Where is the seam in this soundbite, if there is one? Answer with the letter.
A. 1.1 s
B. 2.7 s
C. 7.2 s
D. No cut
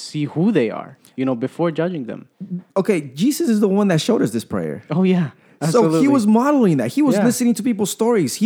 B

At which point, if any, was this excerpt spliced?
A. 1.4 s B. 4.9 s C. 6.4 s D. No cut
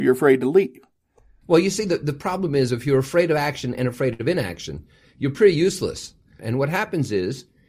C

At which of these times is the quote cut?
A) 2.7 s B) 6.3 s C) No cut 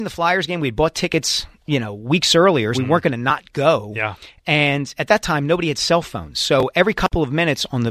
A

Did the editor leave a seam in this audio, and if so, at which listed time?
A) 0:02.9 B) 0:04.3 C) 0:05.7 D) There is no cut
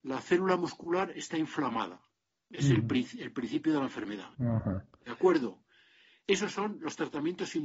B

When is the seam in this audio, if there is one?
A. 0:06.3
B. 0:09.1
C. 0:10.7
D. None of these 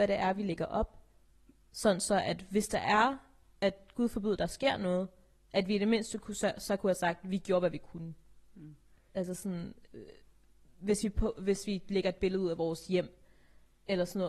B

